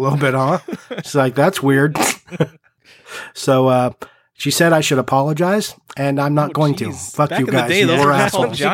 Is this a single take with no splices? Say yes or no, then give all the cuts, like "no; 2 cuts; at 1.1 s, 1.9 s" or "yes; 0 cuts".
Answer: yes; 0 cuts